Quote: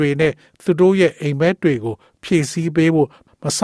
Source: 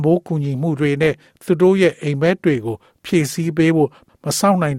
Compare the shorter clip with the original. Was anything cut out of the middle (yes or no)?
no